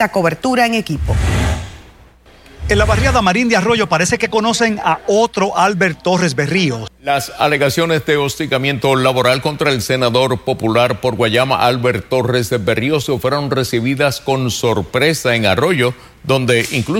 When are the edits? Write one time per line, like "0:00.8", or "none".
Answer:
0:06.9

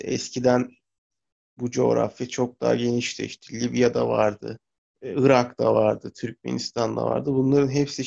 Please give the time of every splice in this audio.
0:04.9

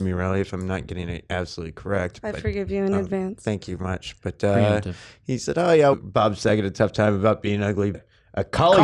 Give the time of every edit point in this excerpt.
0:03.8
0:05.9
0:07.9

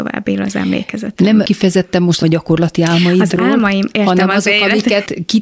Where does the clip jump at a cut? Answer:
none

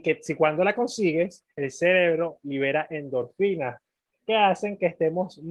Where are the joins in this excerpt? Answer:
none

